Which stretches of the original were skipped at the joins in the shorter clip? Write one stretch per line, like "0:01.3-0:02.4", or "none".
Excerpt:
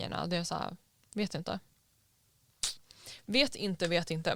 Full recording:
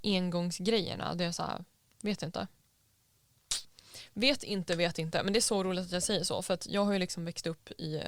none